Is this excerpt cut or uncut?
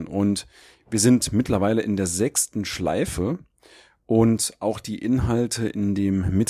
uncut